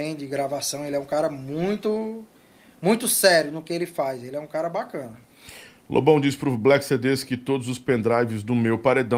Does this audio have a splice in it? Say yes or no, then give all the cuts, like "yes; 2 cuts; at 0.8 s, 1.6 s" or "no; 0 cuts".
no; 0 cuts